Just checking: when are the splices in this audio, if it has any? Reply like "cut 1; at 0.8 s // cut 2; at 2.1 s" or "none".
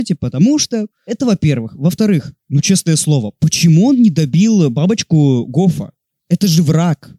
cut 1; at 0.9 s // cut 2; at 6.2 s